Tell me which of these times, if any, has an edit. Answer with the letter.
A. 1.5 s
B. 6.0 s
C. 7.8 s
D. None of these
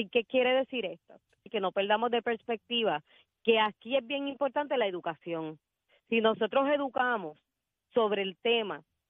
A